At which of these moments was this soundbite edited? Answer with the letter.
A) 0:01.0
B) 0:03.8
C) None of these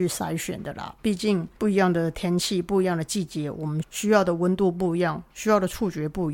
B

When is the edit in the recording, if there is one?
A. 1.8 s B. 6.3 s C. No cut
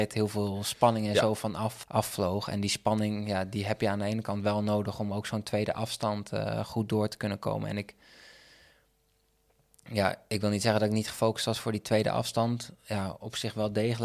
A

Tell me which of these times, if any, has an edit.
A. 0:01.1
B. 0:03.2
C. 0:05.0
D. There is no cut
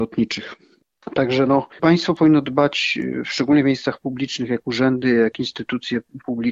D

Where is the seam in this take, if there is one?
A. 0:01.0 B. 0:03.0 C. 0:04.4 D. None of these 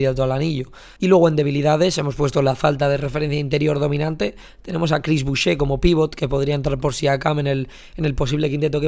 A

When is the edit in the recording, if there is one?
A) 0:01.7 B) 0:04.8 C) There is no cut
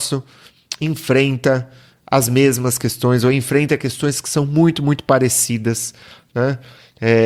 C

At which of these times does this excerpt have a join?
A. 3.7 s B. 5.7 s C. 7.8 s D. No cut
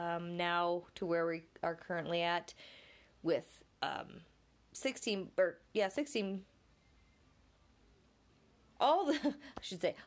A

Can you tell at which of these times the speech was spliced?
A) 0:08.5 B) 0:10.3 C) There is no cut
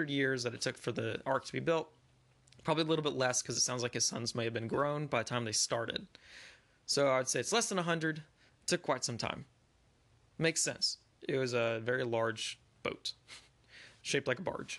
A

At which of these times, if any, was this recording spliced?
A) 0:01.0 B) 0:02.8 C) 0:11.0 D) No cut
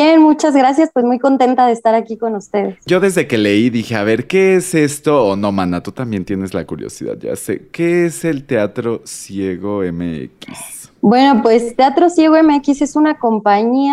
D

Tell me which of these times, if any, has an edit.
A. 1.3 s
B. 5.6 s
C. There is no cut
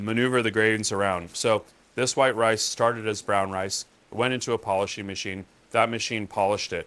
A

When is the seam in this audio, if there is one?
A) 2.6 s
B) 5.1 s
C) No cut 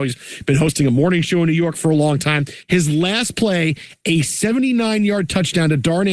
A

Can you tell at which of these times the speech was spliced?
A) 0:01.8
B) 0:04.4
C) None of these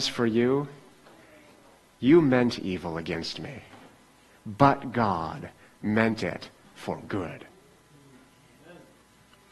B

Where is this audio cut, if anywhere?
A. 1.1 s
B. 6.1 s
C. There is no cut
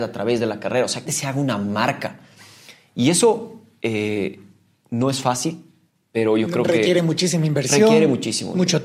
A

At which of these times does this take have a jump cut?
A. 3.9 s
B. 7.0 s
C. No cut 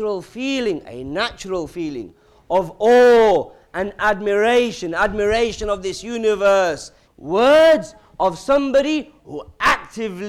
B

